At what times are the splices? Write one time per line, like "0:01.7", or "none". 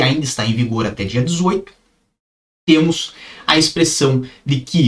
none